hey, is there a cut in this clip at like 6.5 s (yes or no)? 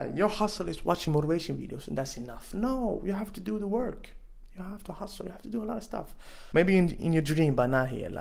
yes